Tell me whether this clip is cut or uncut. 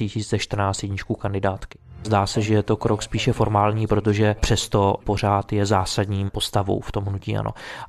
cut